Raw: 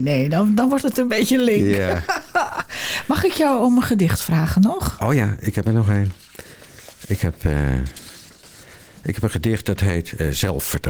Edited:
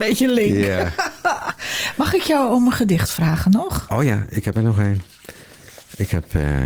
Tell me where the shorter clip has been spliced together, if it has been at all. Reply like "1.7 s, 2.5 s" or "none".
none